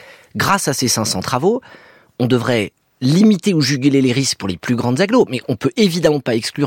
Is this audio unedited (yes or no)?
yes